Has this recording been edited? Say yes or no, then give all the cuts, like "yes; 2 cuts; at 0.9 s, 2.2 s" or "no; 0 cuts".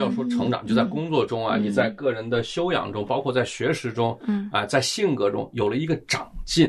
no; 0 cuts